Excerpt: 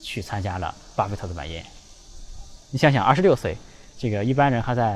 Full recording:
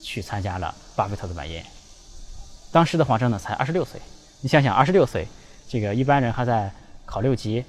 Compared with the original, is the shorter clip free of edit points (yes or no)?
no